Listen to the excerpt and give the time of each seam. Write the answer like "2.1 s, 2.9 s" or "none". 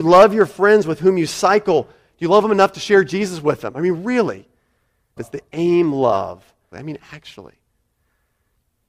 5.2 s, 6.7 s